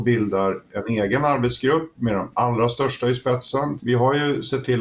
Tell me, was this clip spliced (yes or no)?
yes